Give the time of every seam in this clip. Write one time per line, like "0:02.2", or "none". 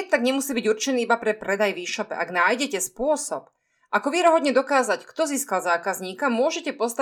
none